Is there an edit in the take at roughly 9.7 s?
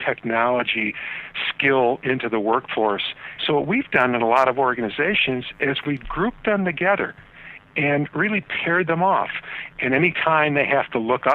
yes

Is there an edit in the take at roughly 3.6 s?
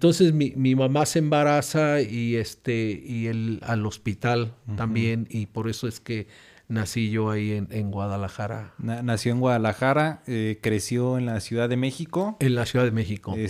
yes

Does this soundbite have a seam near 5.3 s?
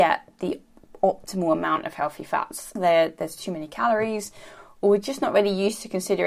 no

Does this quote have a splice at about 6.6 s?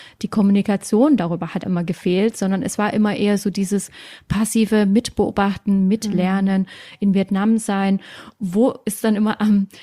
no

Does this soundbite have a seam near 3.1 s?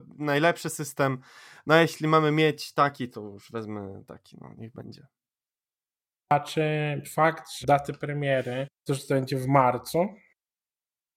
yes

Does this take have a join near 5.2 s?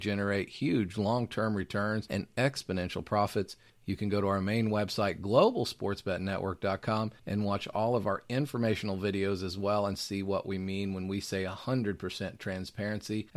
no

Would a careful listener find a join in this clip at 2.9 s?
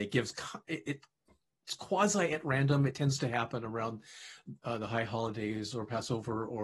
no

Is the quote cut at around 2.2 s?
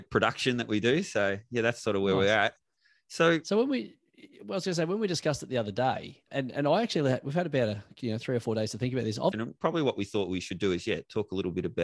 no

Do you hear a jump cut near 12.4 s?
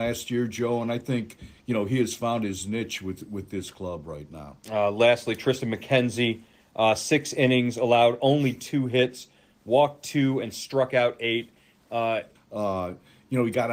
yes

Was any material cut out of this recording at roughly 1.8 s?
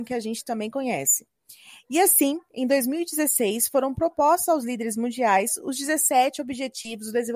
no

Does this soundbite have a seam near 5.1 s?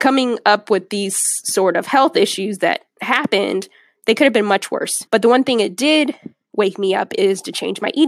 yes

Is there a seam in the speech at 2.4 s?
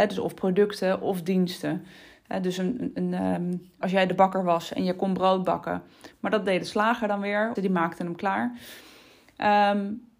no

